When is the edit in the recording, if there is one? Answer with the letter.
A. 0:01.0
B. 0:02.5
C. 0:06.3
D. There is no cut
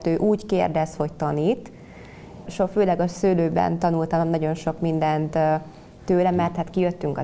B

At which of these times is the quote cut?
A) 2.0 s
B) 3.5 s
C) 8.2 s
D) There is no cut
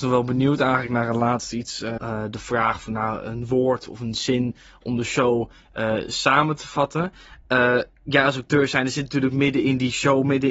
A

